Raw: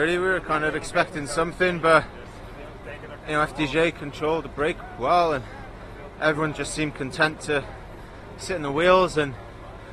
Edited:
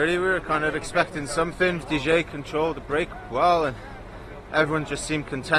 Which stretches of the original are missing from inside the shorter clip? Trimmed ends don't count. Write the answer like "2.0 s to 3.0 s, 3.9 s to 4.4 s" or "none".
1.8 s to 3.5 s

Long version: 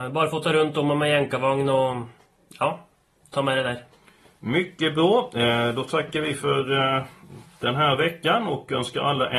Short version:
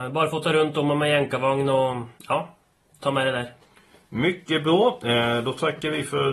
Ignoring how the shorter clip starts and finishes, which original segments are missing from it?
2.2 s to 2.5 s

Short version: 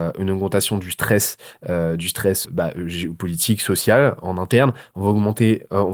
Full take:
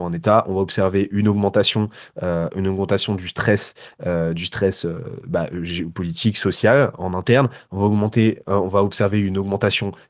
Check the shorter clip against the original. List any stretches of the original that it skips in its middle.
4.8 s to 5.2 s

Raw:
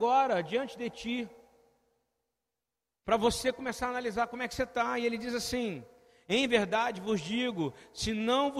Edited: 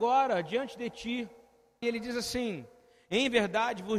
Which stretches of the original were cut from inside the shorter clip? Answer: 1.8 s to 5.0 s

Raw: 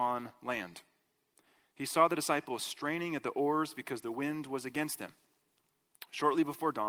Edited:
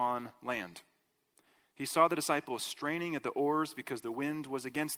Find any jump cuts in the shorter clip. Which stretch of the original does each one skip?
none

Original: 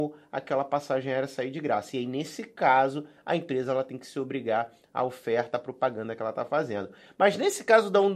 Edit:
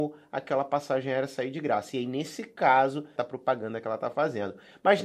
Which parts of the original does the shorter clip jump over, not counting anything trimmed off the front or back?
3.2 s to 5.5 s

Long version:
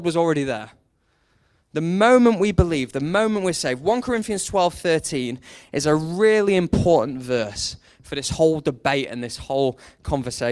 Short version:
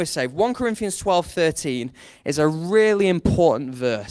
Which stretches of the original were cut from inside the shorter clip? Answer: none

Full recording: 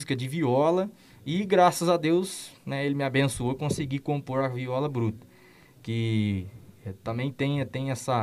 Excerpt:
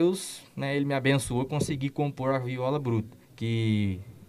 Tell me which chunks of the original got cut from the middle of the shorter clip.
5.3 s to 5.7 s

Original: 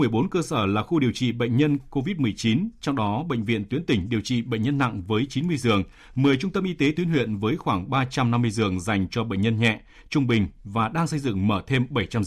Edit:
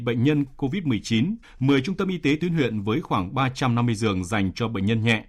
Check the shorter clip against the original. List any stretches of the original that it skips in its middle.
2.8 s to 6.0 s

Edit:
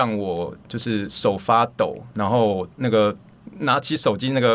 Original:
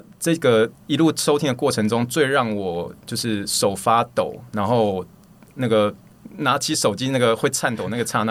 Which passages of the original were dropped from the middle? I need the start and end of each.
5.1 s to 5.5 s

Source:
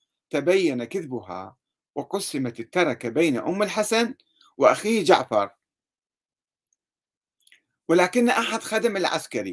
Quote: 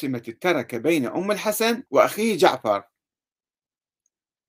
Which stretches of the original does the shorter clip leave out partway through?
4.2 s to 4.5 s

